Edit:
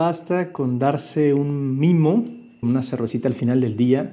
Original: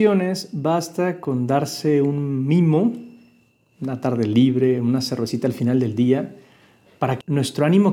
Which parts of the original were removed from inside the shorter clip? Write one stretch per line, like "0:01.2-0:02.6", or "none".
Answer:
0:03.3-0:04.8